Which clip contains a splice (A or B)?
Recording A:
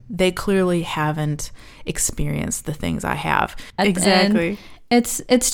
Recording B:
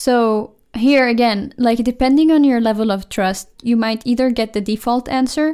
A